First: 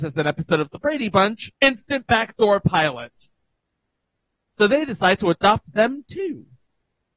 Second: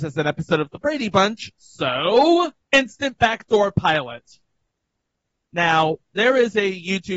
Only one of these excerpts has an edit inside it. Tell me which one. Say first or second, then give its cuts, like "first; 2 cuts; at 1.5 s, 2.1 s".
first; 2 cuts; at 1.5 s, 4.4 s